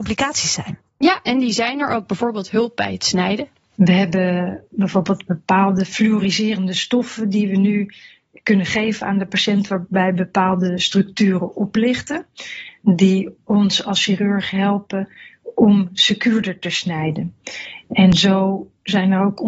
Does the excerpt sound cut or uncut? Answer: uncut